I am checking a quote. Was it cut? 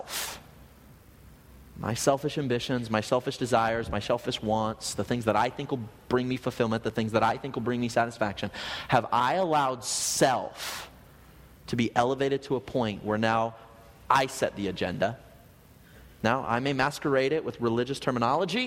no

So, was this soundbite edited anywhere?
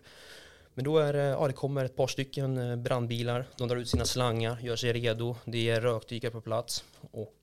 no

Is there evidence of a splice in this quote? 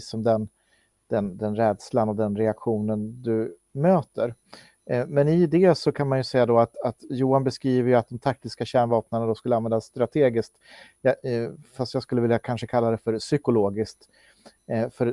no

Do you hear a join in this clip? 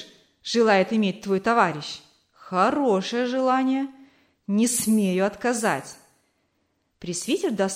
no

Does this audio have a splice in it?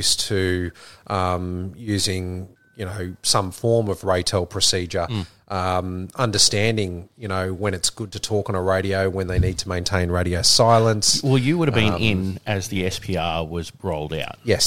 no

